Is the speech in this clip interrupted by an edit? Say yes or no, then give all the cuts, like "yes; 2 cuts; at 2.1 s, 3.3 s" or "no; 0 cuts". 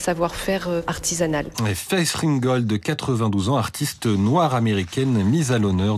yes; 1 cut; at 1.5 s